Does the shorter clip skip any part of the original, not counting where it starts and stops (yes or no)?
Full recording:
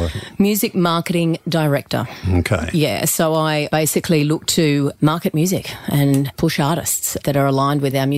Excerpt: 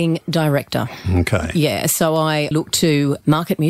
yes